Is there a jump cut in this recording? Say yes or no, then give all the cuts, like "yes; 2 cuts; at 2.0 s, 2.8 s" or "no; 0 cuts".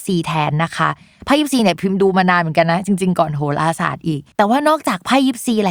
yes; 1 cut; at 4.3 s